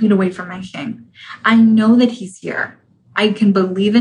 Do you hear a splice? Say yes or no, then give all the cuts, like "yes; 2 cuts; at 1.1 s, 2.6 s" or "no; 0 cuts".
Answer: no; 0 cuts